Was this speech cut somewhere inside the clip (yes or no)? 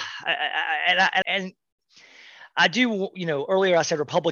yes